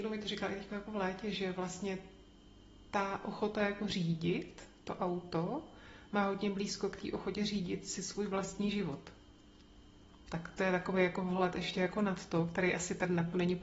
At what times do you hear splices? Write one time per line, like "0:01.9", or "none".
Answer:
none